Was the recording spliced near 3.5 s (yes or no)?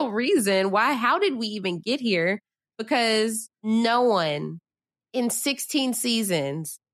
yes